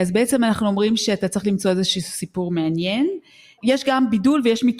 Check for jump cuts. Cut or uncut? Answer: uncut